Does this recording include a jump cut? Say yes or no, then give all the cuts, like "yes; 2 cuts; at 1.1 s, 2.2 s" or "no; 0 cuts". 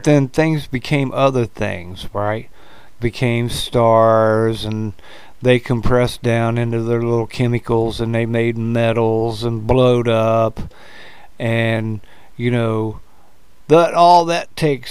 yes; 1 cut; at 3.0 s